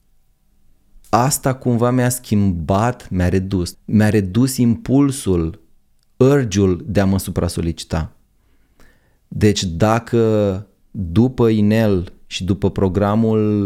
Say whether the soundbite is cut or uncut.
cut